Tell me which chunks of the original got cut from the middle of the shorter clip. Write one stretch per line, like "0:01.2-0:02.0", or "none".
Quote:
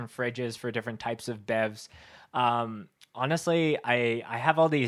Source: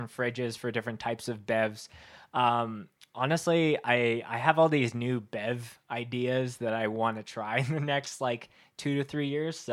none